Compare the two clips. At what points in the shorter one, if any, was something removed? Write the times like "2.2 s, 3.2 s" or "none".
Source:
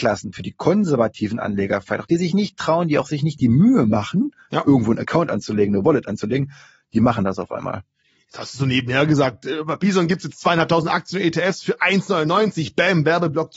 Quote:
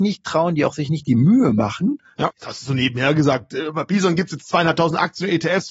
2.3 s